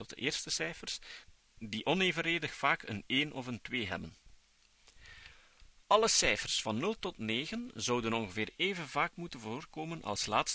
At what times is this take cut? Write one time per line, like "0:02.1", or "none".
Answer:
none

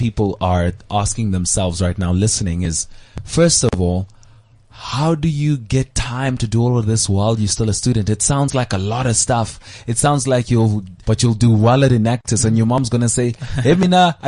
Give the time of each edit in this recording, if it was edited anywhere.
0:11.0

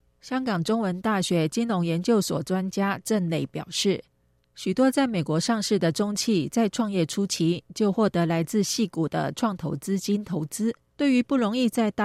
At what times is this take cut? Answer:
0:10.9

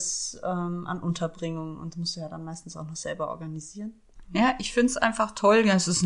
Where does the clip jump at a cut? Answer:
0:04.2

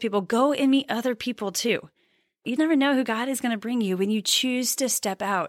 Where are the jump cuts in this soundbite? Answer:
0:02.6

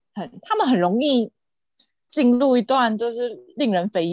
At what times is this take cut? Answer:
none

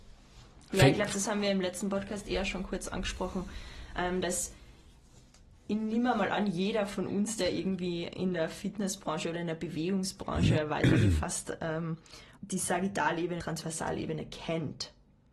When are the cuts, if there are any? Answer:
0:12.3
0:13.4

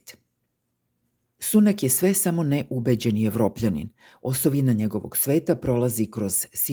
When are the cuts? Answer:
none

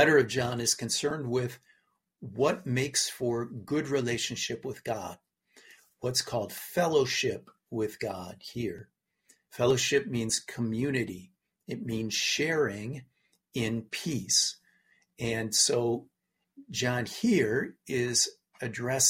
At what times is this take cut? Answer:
none

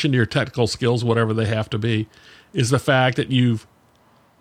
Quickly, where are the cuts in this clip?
none

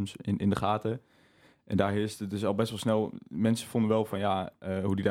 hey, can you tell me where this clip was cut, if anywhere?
none

